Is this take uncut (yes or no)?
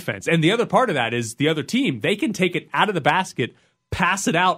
yes